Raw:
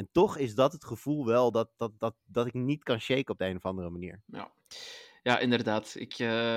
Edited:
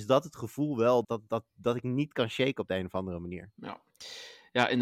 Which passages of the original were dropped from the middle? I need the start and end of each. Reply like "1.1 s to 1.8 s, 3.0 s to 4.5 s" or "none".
1.5 s to 1.7 s